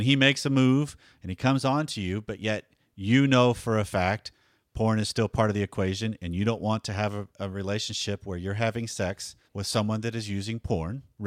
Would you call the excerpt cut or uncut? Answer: cut